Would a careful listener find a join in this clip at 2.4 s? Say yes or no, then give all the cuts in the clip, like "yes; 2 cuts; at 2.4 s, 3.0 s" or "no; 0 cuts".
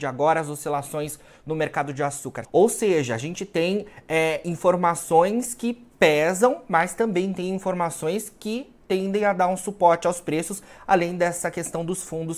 yes; 1 cut; at 2.4 s